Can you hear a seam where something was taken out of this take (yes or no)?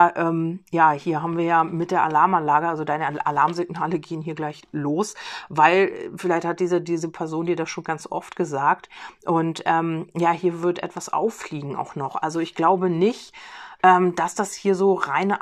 no